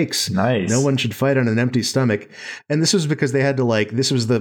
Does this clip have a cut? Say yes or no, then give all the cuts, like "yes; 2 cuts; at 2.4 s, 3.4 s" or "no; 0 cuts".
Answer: no; 0 cuts